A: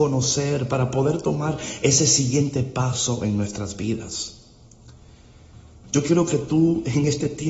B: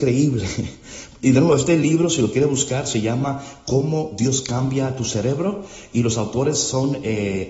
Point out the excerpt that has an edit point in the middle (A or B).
A